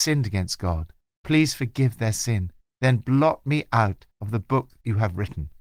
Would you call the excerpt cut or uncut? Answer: cut